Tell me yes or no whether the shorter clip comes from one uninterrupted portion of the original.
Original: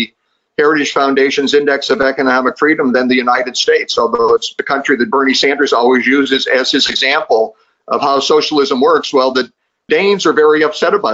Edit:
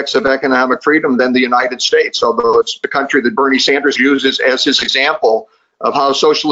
no